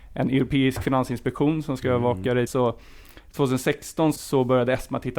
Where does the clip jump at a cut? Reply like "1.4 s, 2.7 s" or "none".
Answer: 2.5 s, 4.2 s